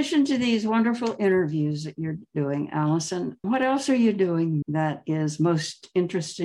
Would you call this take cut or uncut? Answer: cut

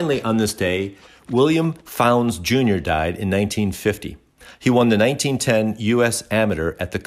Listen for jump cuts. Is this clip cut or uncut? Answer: uncut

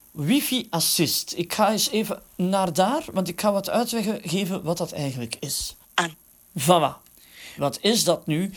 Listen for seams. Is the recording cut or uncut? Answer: cut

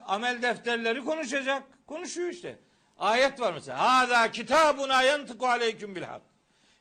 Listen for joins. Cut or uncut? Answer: uncut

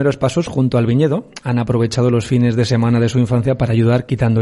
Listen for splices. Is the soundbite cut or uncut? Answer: uncut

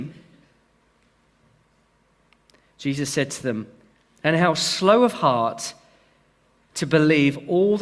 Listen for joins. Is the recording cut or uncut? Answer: cut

